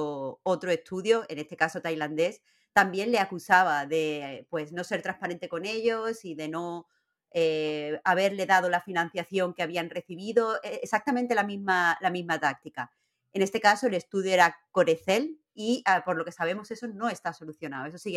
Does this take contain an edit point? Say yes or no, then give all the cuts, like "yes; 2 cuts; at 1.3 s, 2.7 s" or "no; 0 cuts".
no; 0 cuts